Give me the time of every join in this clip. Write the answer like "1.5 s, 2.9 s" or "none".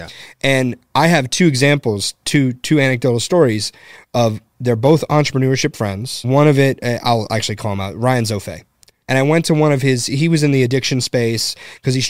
6.2 s, 9.0 s